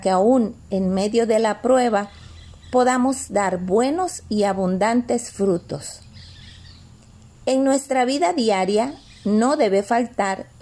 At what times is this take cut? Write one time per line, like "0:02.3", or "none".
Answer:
none